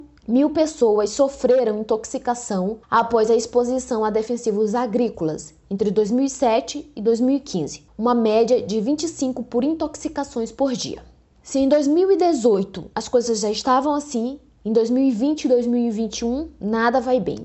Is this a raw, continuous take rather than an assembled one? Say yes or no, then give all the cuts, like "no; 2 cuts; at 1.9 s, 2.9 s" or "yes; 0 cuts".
yes; 0 cuts